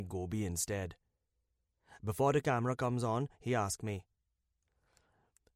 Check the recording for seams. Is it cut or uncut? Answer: uncut